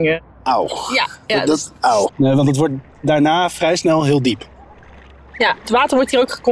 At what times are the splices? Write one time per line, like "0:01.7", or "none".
0:02.1